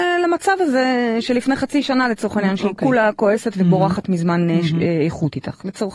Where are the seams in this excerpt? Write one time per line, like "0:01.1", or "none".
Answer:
none